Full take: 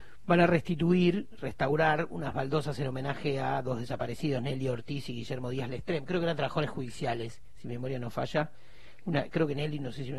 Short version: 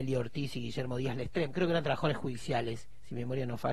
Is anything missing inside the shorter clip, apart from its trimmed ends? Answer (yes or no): no